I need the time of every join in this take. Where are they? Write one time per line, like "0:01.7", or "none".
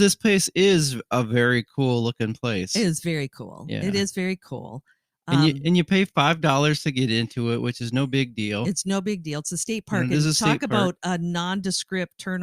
none